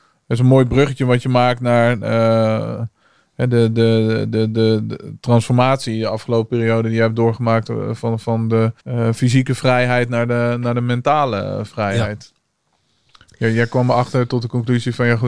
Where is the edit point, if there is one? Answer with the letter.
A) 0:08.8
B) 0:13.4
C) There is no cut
A